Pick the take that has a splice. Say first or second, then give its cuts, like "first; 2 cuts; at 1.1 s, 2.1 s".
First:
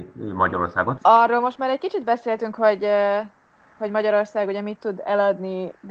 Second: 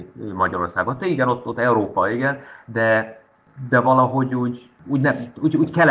first; 1 cut; at 1.0 s